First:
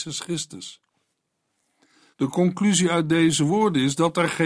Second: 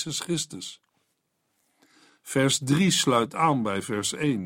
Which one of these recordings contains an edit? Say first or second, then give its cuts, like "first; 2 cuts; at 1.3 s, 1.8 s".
first; 1 cut; at 2.1 s